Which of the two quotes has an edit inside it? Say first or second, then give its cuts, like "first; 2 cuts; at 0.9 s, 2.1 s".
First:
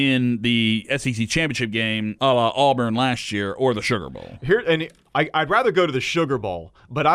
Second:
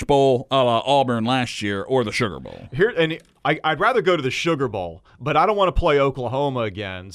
first; 1 cut; at 2.2 s